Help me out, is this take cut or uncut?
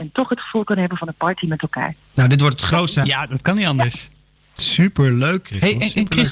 cut